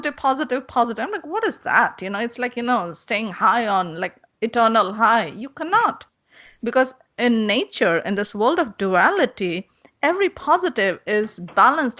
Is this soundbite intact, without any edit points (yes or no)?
yes